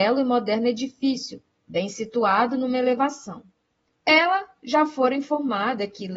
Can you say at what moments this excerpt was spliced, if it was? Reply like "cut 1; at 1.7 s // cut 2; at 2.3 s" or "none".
cut 1; at 3.9 s